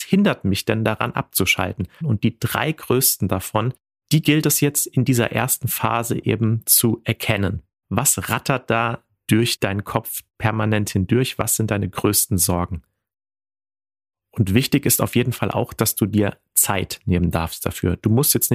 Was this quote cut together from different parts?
yes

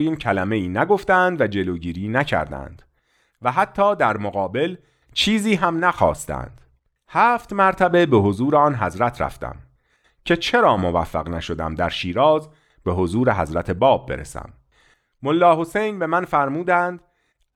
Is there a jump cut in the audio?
yes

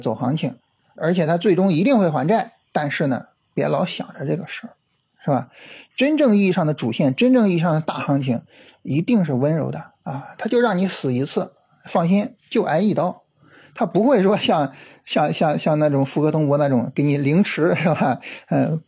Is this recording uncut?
no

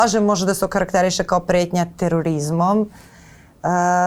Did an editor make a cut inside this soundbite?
no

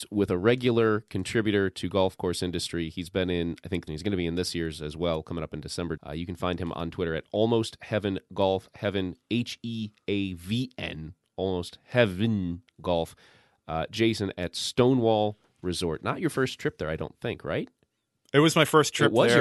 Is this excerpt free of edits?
no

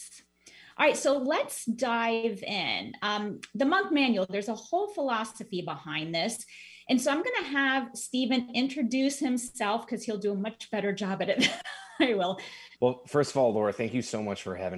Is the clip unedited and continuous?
no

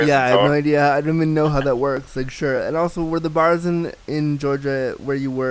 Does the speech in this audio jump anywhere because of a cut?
no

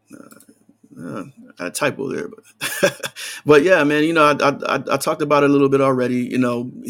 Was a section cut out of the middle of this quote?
no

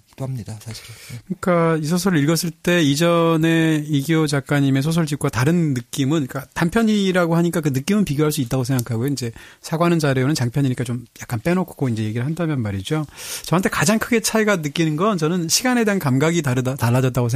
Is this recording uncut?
yes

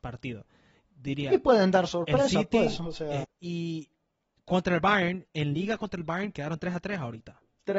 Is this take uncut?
no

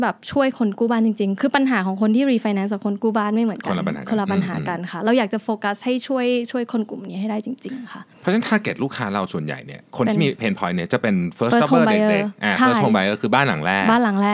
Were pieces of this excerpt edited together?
no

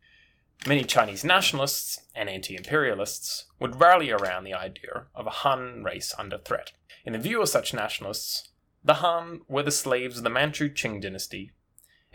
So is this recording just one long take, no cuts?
yes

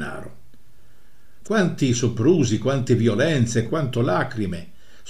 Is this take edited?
yes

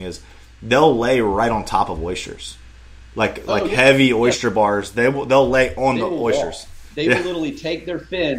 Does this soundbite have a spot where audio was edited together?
no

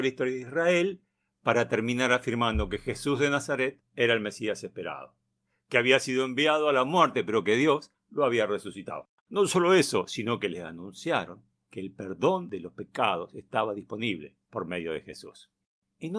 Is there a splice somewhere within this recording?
yes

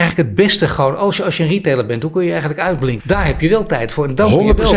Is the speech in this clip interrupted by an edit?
yes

